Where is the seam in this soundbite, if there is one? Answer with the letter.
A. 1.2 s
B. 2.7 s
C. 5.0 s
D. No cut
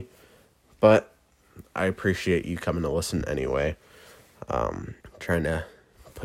C